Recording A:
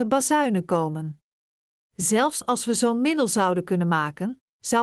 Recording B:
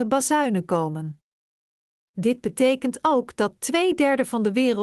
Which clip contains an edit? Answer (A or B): A